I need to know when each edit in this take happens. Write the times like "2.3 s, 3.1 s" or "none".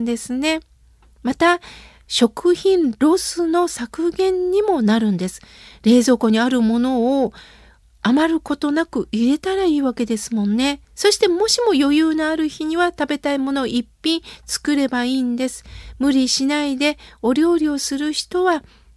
10.8 s